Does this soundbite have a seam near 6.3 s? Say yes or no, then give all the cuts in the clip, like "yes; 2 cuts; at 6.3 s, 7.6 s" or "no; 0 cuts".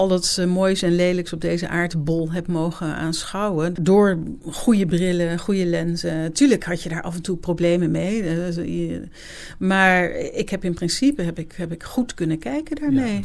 no; 0 cuts